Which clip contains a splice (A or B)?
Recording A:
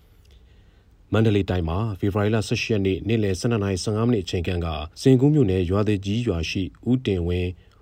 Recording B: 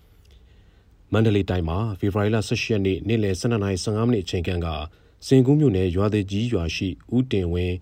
A